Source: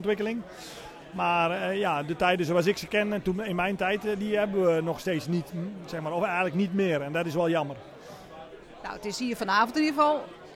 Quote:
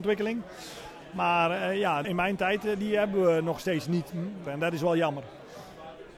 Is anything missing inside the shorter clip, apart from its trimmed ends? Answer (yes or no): yes